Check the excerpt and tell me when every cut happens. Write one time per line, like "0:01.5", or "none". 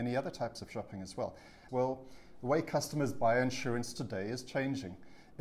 0:01.7